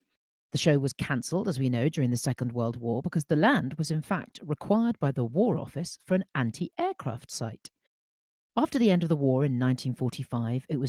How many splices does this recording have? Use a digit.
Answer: 0